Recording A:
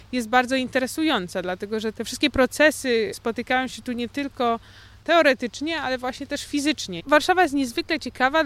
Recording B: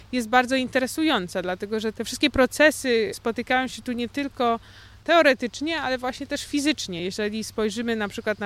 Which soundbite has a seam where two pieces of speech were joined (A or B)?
A